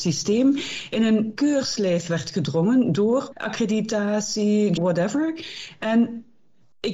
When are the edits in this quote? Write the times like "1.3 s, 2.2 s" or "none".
3.3 s, 4.8 s